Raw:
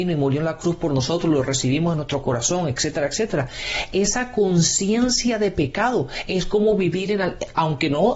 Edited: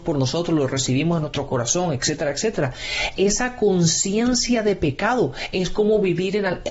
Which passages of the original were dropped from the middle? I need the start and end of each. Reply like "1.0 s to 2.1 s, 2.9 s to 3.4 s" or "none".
none

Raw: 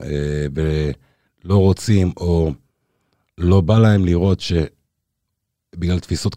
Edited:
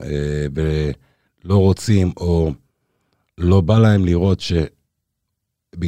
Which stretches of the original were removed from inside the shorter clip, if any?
none

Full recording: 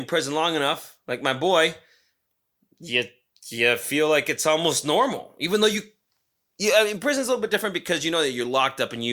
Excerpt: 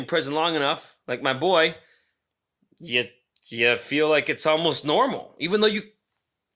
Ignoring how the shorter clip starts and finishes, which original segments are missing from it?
none

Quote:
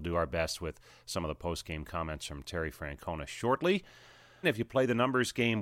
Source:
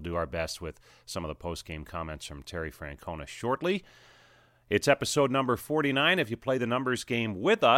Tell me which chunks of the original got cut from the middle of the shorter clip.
4.4 s to 6.2 s

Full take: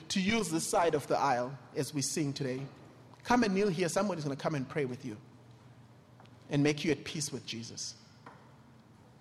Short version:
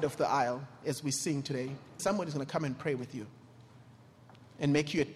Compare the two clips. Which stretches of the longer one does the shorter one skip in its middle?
2.9 s to 3.9 s

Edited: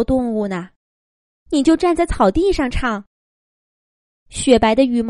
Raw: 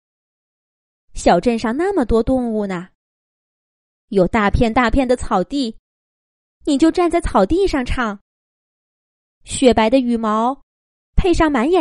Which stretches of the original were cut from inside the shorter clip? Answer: 3.6 s to 6.6 s

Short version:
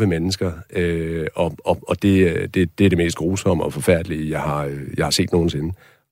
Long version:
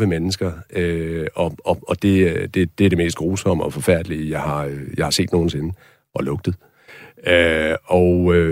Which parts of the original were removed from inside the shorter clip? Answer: none

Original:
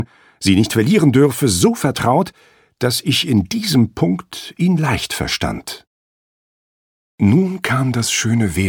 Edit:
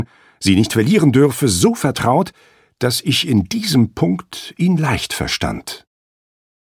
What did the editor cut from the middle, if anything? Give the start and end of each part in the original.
none

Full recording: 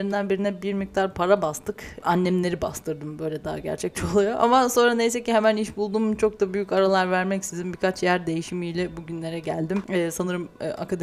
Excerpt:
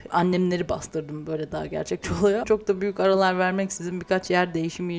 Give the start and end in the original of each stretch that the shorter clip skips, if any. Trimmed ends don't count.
4.4 s to 6.2 s

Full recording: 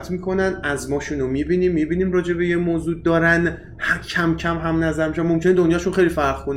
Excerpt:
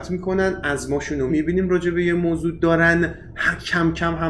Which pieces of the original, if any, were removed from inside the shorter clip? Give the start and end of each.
1.3 s to 1.7 s

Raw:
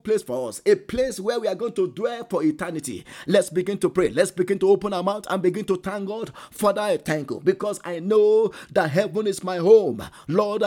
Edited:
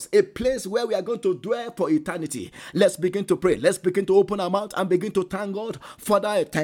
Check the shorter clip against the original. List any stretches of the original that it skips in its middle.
none

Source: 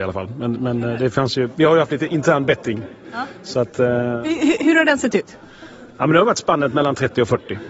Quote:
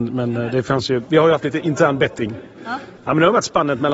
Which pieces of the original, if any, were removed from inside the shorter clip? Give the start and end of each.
3.4 s to 5.9 s

